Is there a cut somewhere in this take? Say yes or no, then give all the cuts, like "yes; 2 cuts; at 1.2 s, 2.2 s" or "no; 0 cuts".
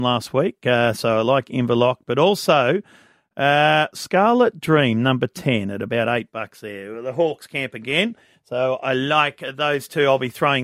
no; 0 cuts